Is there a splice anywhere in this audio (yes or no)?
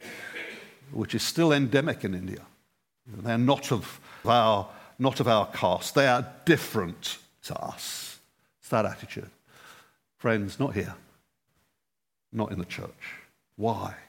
yes